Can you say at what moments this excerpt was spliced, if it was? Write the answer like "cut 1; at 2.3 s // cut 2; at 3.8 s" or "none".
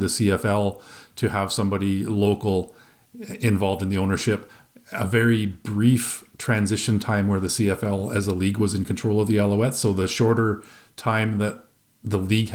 none